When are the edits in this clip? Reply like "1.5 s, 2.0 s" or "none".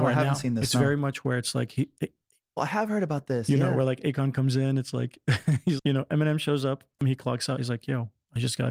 2.6 s, 5.8 s, 7.0 s